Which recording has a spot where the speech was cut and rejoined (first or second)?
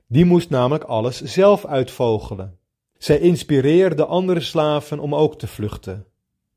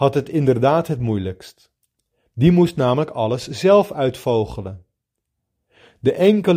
first